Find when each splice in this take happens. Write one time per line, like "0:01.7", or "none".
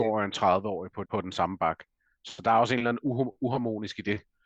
0:01.1